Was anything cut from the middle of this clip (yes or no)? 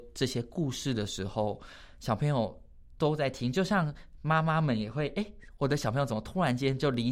no